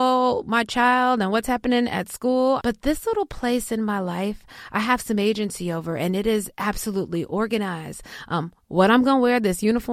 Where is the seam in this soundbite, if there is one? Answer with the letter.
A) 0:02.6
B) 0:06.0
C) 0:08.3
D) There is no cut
A